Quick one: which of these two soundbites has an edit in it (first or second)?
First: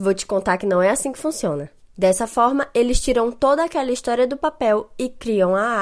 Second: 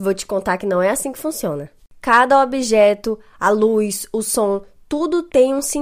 first